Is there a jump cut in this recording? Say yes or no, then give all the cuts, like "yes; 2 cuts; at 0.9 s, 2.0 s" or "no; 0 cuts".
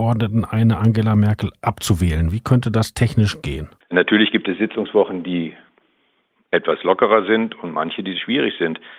yes; 1 cut; at 3.8 s